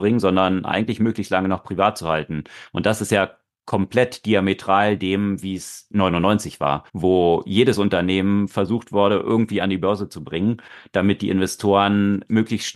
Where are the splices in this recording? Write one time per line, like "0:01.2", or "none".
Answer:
0:06.9